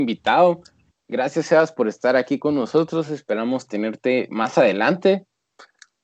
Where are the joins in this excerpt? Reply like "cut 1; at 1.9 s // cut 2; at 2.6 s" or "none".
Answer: none